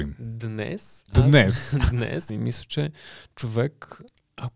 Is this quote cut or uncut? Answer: cut